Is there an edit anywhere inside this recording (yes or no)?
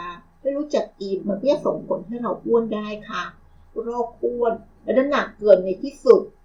yes